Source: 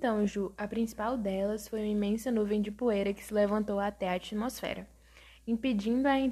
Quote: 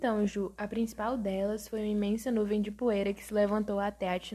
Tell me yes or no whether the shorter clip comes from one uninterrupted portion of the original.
yes